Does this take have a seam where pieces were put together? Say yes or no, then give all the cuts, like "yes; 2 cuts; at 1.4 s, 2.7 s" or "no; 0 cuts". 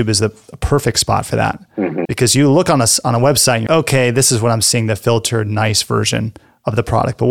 yes; 2 cuts; at 2.1 s, 3.7 s